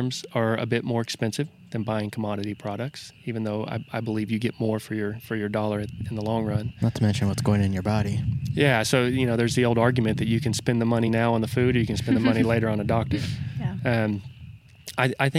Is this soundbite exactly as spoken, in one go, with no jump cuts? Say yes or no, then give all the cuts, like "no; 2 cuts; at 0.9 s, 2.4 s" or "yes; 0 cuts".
yes; 0 cuts